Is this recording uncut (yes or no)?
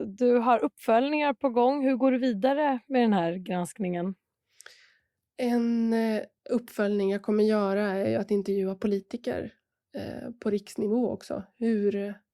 yes